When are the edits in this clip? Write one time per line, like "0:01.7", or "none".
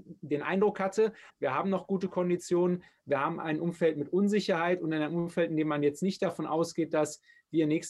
0:01.3